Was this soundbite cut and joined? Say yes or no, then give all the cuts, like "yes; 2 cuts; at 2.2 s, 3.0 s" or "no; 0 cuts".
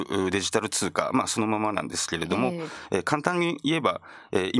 no; 0 cuts